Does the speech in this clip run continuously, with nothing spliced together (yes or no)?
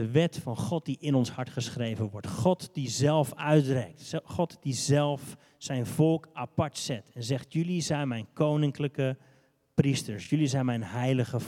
yes